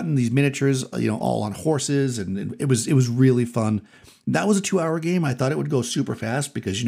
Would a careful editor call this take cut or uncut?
uncut